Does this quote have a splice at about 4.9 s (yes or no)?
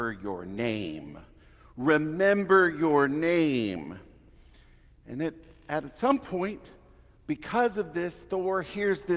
no